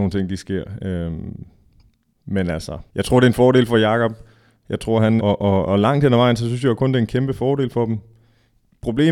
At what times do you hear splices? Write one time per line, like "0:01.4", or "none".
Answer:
0:02.9
0:05.2